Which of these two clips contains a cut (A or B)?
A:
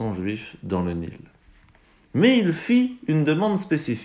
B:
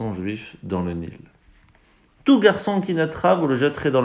B